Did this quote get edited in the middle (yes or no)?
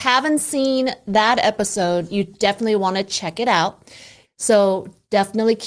yes